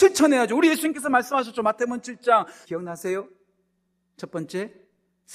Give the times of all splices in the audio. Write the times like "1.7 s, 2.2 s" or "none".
2.6 s